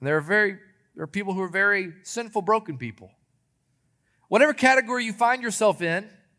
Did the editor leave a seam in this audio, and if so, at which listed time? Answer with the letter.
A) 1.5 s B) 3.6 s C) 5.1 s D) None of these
D